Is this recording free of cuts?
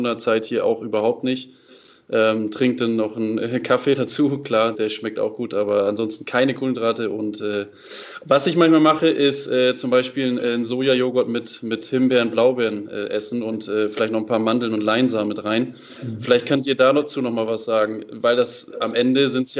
no; 1 cut; at 4.7 s

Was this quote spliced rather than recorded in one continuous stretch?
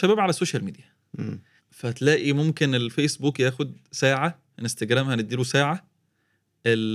yes; 2 cuts; at 1.6 s, 4.5 s

